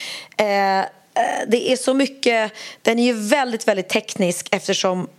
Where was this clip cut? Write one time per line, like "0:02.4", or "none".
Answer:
none